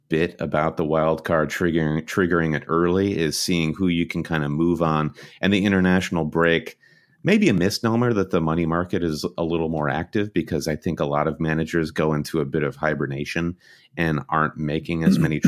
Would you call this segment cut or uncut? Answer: uncut